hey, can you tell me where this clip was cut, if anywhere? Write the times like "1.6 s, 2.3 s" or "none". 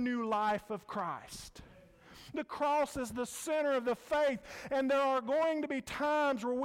none